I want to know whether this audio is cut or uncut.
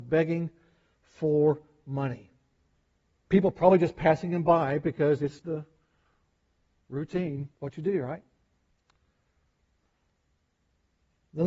cut